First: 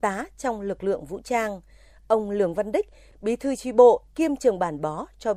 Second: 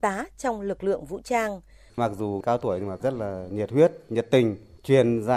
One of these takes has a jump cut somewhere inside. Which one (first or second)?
second